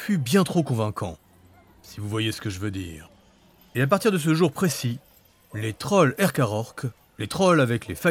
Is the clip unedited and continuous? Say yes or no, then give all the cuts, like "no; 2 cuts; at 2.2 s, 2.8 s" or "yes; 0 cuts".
yes; 0 cuts